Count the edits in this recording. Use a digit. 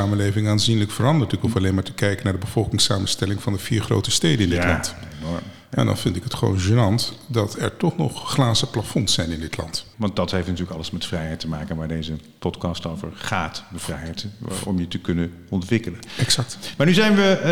1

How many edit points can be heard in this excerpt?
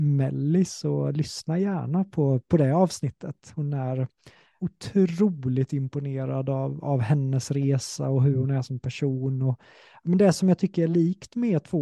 1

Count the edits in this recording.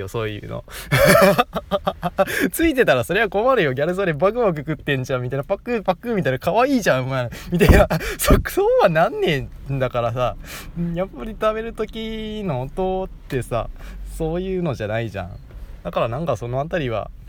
0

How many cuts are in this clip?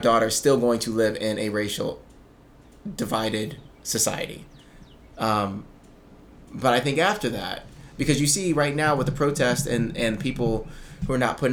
0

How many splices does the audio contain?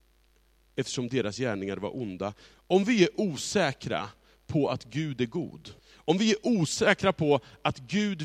2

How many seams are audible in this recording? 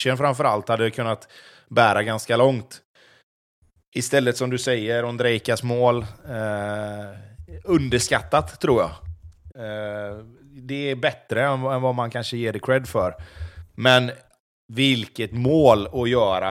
1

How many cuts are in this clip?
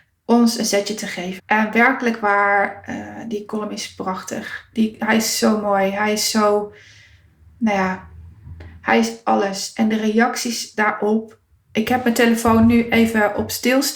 2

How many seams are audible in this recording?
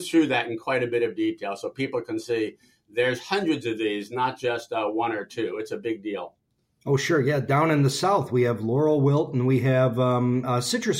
0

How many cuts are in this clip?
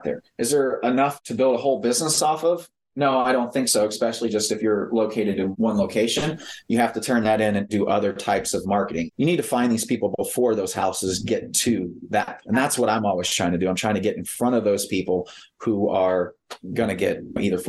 0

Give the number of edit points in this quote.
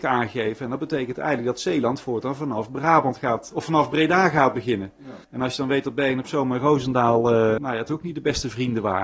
2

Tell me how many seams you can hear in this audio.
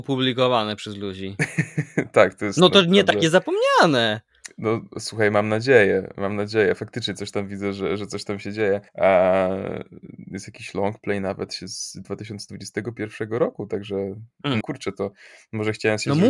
2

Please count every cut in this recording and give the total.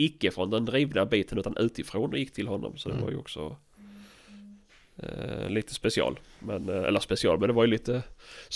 0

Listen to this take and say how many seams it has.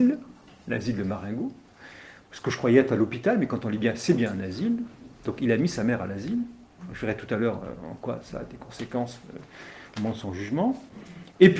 0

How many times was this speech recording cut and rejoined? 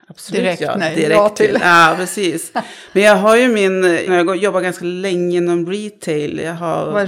1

